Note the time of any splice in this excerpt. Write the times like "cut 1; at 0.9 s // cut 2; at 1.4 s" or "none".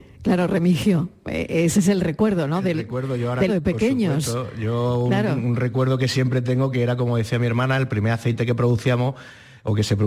cut 1; at 3.5 s